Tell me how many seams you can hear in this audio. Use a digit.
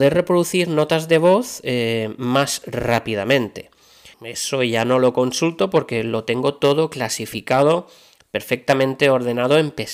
1